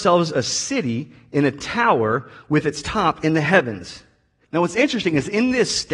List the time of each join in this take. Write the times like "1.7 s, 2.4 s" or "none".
4.4 s